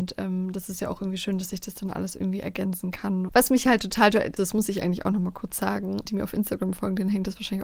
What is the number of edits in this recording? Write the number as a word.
three